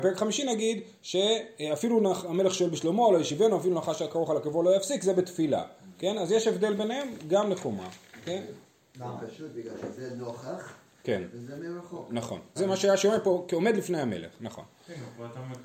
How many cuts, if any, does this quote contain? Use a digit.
1